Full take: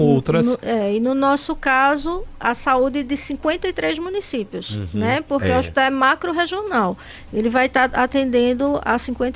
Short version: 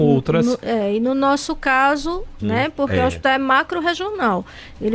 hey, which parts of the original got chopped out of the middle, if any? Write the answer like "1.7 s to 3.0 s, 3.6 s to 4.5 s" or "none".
2.4 s to 4.9 s